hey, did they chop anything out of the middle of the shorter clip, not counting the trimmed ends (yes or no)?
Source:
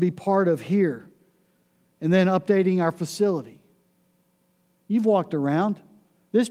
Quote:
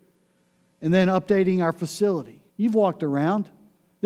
yes